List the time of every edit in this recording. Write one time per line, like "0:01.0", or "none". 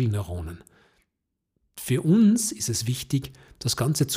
none